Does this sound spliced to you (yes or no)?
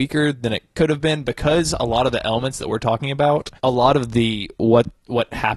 yes